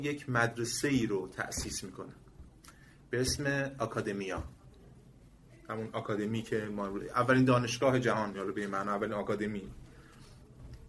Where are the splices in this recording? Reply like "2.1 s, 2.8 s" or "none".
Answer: none